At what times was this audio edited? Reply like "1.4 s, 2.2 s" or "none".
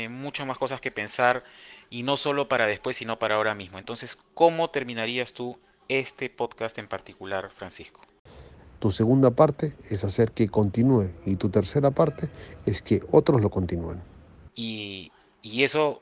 8.8 s, 14.5 s